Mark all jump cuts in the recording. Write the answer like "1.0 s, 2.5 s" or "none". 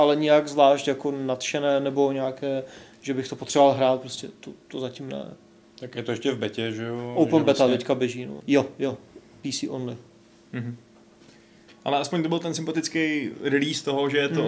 8.4 s, 11.7 s